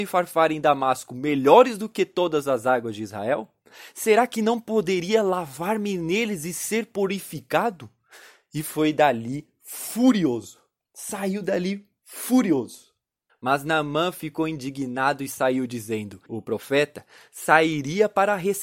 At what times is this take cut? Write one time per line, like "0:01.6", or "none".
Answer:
0:13.3
0:16.3